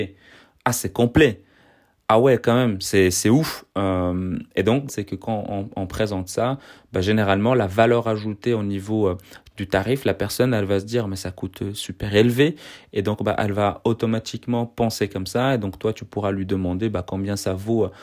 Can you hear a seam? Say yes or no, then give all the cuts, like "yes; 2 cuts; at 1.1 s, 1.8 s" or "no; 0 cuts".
yes; 1 cut; at 4.9 s